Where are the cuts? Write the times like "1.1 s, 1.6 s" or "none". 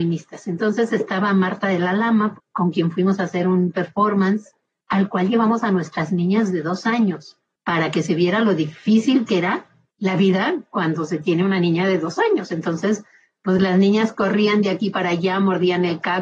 2.3 s